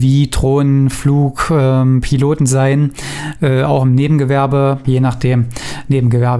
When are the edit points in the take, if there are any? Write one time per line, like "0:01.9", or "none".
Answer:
0:04.8